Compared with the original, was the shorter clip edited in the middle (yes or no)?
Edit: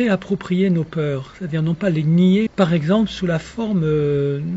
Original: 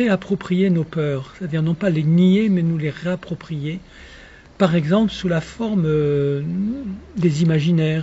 yes